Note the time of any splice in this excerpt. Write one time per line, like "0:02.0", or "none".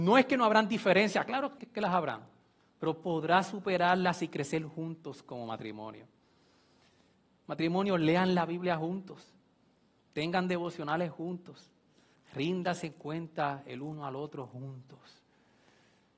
0:01.6

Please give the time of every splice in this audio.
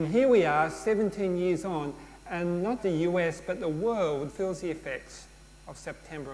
0:02.8
0:04.3

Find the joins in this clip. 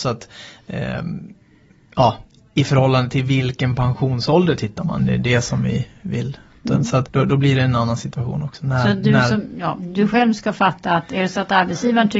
0:05.0
0:06.6

